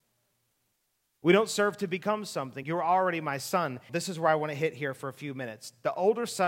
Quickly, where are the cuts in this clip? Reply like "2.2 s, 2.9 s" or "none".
2.6 s, 3.9 s